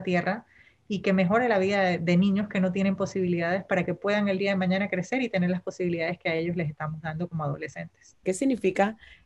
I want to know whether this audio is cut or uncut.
cut